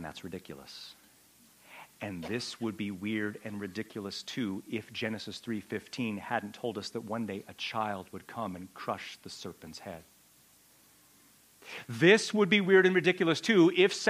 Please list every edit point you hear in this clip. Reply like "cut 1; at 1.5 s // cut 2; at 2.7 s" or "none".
none